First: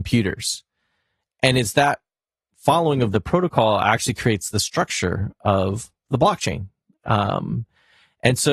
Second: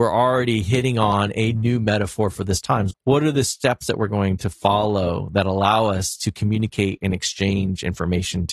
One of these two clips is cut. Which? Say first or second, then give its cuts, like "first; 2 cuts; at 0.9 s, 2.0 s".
second; 1 cut; at 2.9 s